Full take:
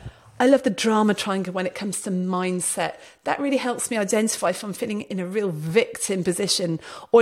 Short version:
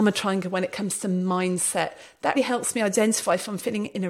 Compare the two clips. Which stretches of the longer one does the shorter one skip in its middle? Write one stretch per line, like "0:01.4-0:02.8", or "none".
0:03.4-0:03.5